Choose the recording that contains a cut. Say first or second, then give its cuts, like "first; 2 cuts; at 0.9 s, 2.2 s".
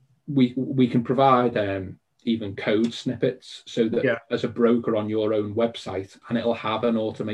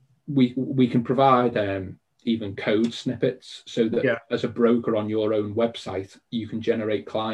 first; 1 cut; at 6.2 s